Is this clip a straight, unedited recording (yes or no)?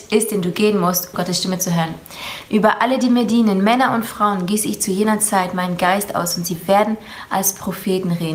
no